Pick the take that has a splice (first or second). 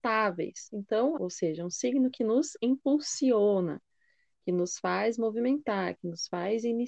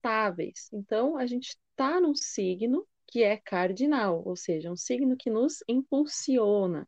first